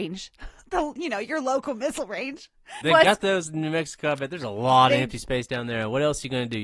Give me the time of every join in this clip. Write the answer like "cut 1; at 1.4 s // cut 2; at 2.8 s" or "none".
cut 1; at 2.8 s